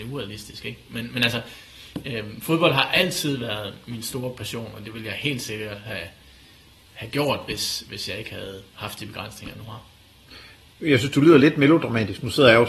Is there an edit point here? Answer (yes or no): no